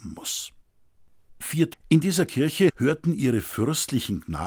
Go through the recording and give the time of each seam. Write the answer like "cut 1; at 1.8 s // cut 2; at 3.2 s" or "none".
cut 1; at 1.7 s